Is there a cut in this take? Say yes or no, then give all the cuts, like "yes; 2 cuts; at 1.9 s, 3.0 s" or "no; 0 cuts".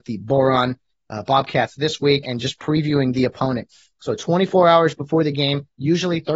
yes; 1 cut; at 2.2 s